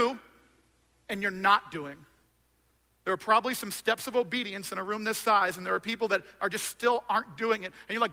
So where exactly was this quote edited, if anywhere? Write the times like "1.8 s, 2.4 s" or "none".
none

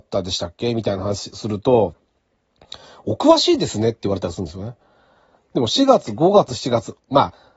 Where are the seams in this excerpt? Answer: 5.4 s, 6.5 s

